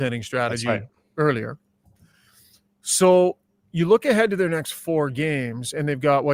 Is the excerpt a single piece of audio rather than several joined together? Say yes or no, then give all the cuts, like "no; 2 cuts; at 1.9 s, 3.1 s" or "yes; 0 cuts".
yes; 0 cuts